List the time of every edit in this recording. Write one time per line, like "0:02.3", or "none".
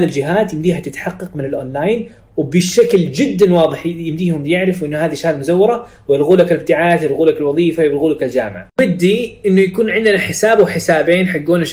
none

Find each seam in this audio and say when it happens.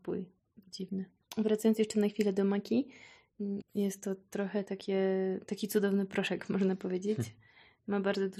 0:03.6

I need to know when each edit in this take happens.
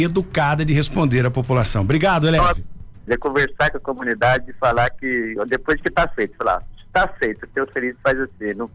0:03.1

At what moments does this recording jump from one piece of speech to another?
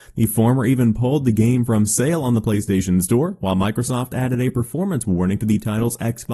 none

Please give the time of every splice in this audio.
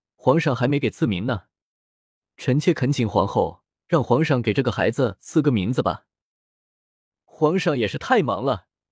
none

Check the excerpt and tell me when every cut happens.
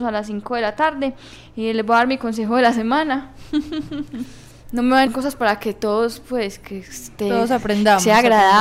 0:05.1

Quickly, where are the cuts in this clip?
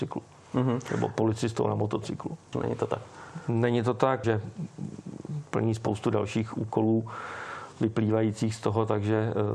0:02.5
0:04.2

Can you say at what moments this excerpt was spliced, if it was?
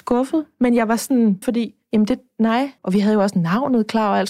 0:01.4
0:02.8

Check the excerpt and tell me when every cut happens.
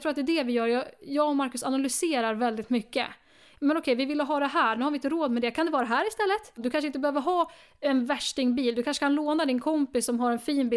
none

